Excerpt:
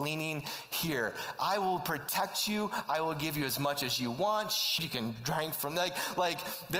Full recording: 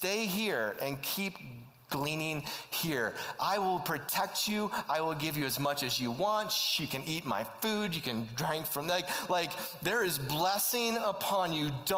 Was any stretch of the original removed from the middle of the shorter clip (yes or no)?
yes